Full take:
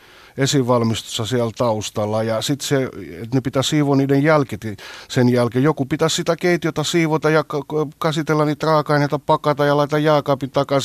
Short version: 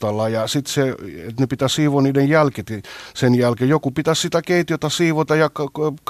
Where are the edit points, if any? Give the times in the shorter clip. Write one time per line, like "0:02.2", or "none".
none